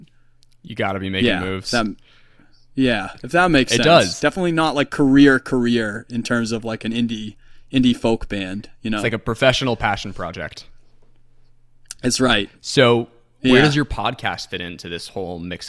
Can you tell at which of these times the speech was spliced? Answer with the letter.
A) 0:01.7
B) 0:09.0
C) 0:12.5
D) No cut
D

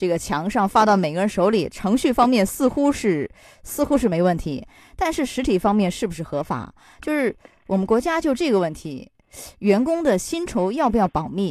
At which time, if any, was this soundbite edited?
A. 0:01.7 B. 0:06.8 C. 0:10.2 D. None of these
D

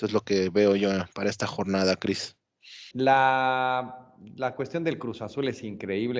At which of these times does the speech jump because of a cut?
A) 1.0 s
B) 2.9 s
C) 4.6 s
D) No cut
B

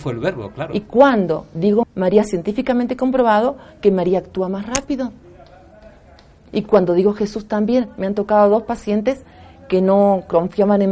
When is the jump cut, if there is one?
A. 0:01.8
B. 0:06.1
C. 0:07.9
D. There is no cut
A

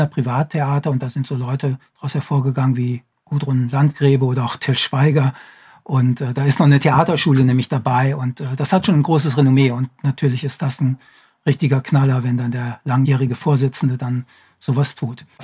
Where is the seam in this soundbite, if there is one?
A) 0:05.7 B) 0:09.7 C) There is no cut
C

